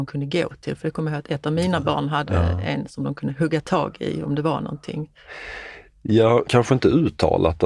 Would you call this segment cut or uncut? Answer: uncut